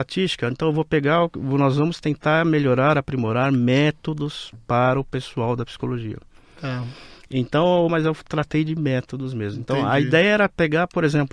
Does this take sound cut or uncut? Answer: cut